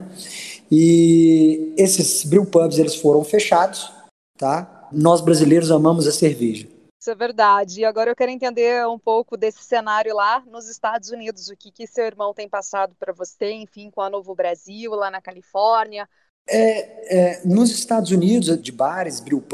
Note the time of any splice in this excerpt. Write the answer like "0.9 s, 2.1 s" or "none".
4.9 s, 16.3 s, 18.6 s